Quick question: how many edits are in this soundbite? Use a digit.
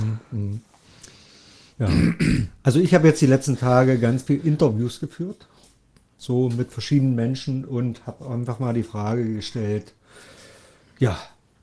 0